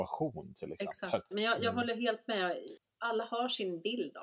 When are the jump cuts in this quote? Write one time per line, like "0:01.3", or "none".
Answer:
0:01.3
0:02.8